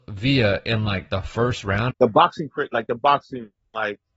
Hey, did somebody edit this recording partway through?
yes; 1 cut; at 1.9 s

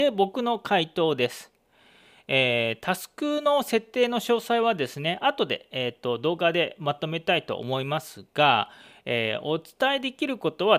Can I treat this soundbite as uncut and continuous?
yes; 0 cuts

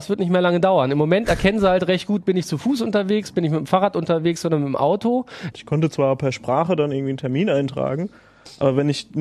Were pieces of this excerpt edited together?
yes; 1 cut; at 5.5 s

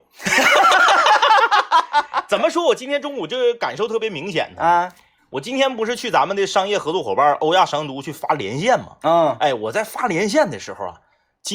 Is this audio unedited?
yes; 0 cuts

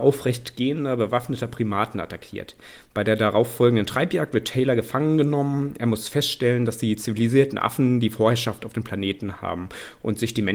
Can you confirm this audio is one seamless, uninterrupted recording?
yes; 0 cuts

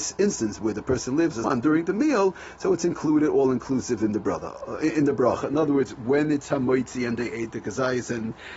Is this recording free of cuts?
no; 2 cuts; at 1.4 s, 5.4 s

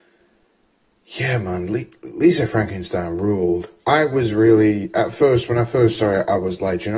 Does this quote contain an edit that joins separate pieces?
no; 0 cuts

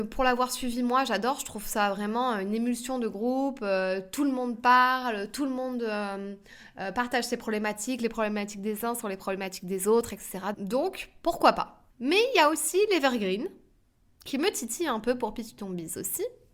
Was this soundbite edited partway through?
yes; 2 cuts; at 10.5 s, 11.9 s

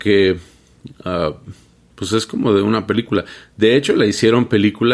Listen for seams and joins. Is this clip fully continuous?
yes; 0 cuts

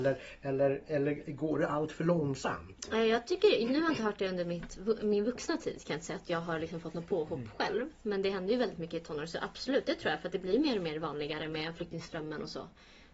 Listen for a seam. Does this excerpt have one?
no; 0 cuts

